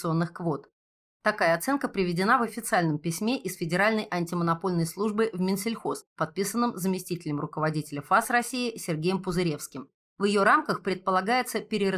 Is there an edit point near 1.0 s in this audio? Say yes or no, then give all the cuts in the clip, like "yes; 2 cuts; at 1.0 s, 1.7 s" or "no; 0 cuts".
no; 1 cut; at 10.0 s